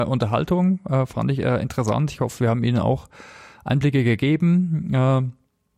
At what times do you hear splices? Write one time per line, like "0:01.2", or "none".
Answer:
none

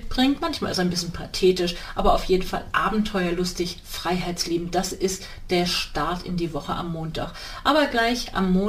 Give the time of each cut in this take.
none

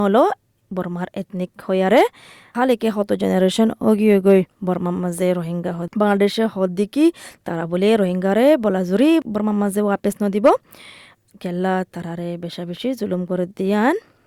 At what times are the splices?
0:04.5

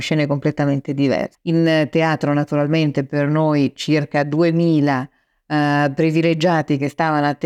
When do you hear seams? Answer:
0:01.4

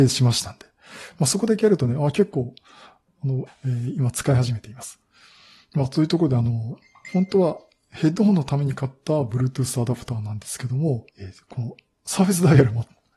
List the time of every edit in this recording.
0:03.5
0:11.1

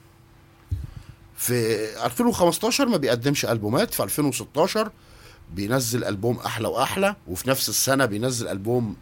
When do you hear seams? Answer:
0:07.2

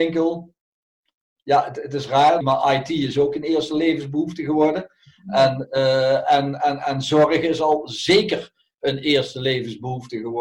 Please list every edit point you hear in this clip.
0:02.4

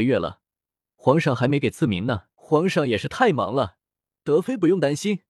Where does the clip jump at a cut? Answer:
0:02.3

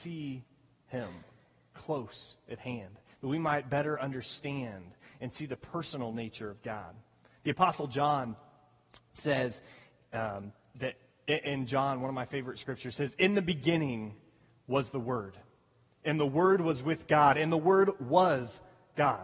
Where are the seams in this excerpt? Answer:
none

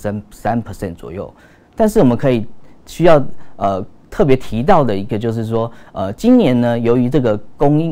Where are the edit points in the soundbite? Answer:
none

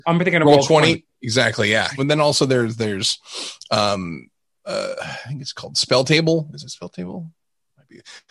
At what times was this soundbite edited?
0:02.0
0:06.5

